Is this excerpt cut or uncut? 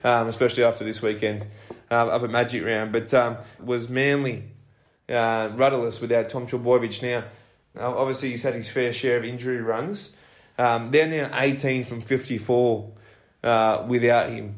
cut